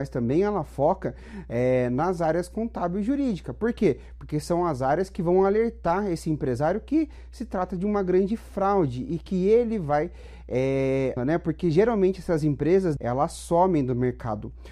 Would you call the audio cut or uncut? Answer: cut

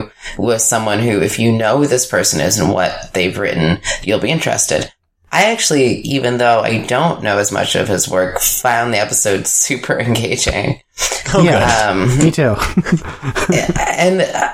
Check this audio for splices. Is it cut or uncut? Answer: uncut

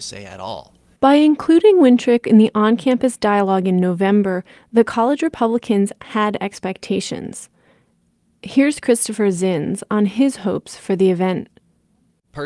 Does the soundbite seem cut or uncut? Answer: cut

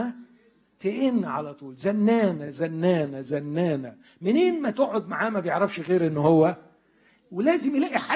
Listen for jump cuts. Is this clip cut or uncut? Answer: uncut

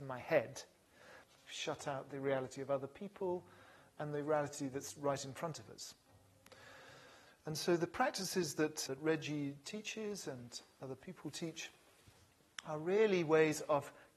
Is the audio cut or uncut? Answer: cut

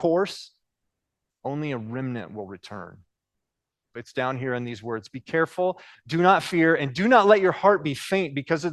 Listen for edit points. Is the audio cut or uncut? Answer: cut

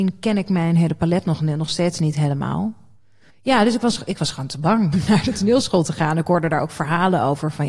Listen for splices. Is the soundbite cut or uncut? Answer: cut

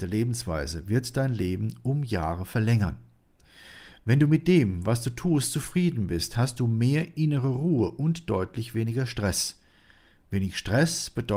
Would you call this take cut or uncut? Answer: uncut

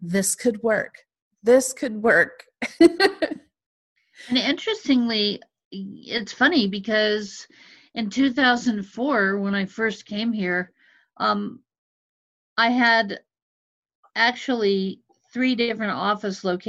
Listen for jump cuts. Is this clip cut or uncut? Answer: uncut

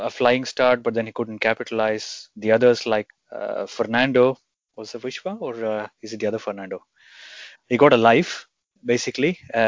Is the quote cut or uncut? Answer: cut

